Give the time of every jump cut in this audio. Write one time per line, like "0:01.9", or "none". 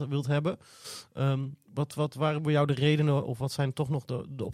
none